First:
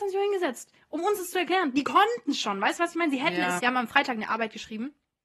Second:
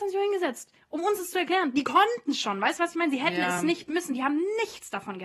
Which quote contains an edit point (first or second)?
first